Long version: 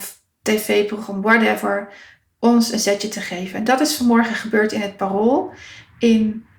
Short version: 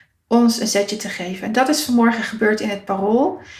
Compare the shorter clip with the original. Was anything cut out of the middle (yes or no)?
no